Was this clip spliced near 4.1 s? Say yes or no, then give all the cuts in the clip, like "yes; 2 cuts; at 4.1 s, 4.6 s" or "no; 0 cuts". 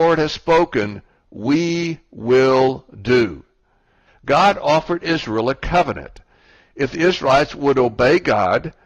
yes; 1 cut; at 4.1 s